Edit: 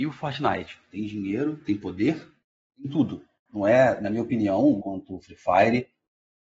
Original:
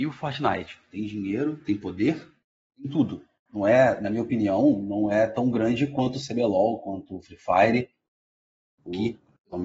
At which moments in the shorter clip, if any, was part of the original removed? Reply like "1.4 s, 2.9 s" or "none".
4.8 s